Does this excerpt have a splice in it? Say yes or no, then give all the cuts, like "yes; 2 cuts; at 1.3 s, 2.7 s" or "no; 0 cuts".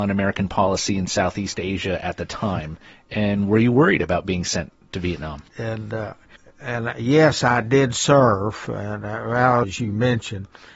yes; 2 cuts; at 5.5 s, 9.6 s